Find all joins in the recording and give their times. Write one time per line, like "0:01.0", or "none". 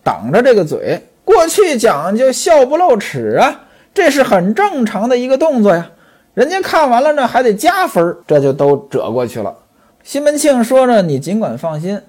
0:08.2
0:09.9